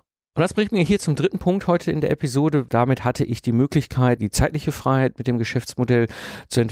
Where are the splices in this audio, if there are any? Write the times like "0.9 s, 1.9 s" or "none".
2.7 s, 4.2 s